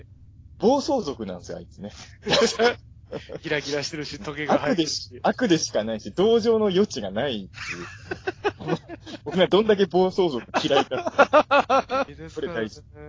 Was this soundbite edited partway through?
yes; 1 cut; at 12.1 s

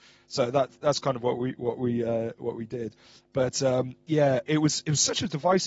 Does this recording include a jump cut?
no; 0 cuts

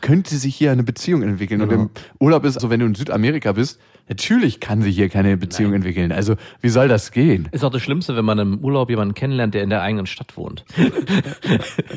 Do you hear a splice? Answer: yes; 2 cuts; at 2.6 s, 10.7 s

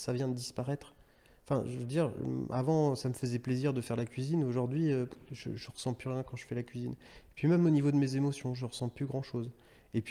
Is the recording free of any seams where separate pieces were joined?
yes; 0 cuts

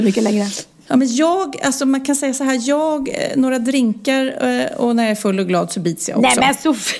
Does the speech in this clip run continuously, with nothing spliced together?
yes; 0 cuts

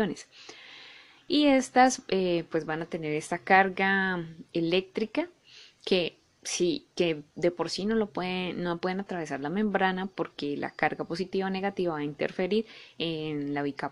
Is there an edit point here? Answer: no; 0 cuts

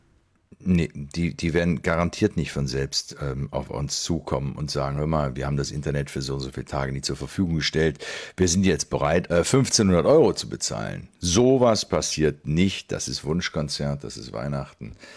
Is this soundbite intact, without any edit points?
no; 1 cut; at 9.3 s

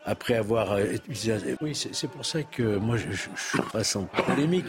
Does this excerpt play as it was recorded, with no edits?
no; 2 cuts; at 1.6 s, 3.7 s

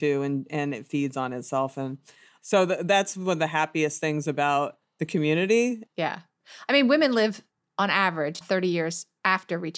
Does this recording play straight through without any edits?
no; 2 cuts; at 5.9 s, 8.4 s

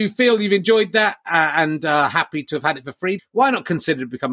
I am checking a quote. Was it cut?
yes; 1 cut; at 3.2 s

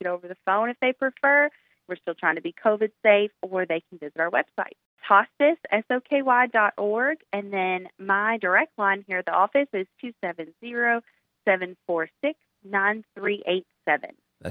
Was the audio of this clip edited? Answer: no; 0 cuts

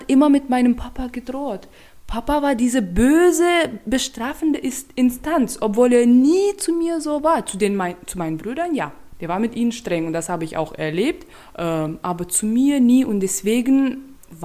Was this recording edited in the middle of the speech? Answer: no; 0 cuts

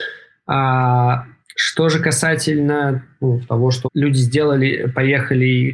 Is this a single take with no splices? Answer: no; 2 cuts; at 1.5 s, 3.8 s

